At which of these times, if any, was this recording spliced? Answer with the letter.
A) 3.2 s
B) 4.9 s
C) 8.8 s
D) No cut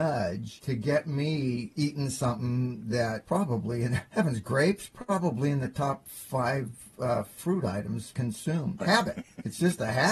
C